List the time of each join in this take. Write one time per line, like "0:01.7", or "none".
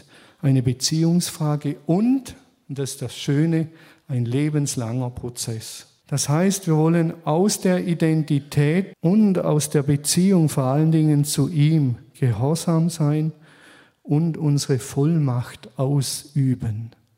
0:06.0
0:08.9